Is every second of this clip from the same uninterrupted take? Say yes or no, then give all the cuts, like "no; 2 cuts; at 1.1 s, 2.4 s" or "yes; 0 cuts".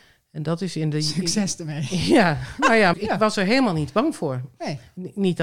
no; 1 cut; at 2.9 s